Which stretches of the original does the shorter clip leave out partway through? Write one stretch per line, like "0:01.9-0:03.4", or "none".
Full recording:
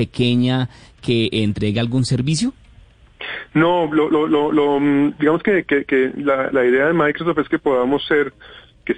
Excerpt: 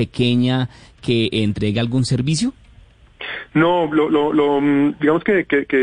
0:04.1-0:04.3